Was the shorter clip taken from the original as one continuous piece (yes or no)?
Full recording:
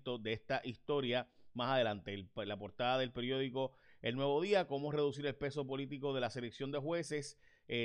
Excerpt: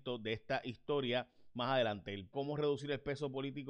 no